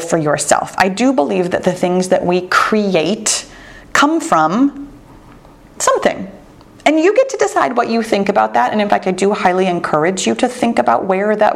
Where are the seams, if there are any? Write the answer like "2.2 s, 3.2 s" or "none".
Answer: none